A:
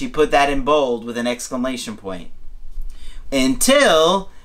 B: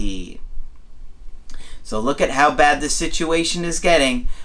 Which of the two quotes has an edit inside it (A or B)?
A